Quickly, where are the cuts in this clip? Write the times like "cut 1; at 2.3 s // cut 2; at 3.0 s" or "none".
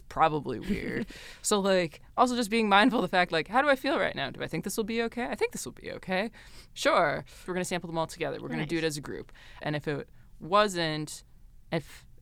cut 1; at 7.5 s // cut 2; at 9.6 s

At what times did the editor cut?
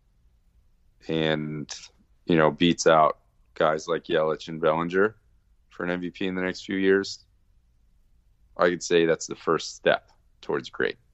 none

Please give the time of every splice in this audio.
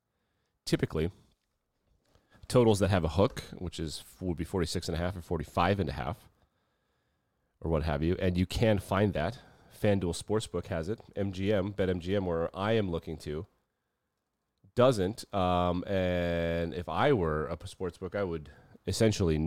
none

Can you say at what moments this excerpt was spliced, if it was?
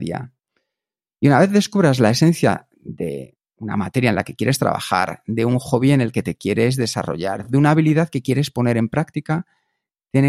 none

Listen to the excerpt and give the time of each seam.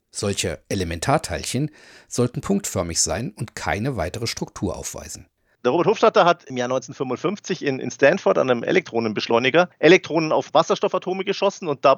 cut 1; at 5.5 s

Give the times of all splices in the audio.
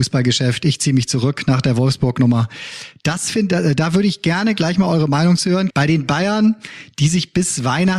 cut 1; at 5.7 s

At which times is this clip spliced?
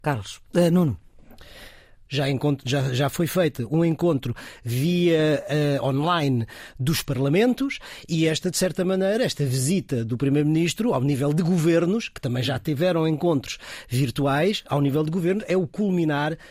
cut 1; at 2.1 s

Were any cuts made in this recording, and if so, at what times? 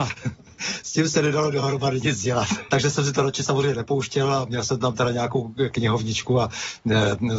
cut 1; at 2.7 s

